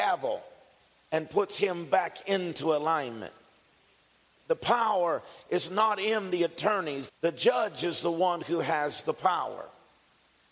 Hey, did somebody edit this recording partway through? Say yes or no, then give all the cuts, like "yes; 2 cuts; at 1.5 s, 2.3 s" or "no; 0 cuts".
yes; 2 cuts; at 4.4 s, 7.1 s